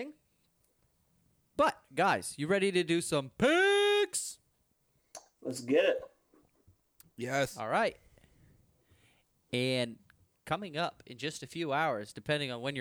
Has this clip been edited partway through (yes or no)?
no